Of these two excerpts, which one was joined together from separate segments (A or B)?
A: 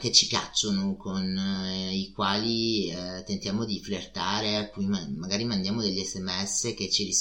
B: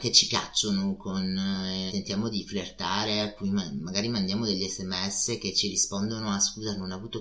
B